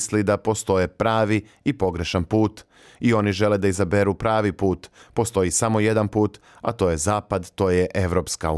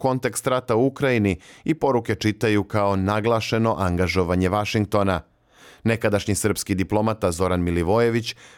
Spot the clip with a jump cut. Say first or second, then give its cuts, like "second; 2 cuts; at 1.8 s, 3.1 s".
first; 1 cut; at 5.0 s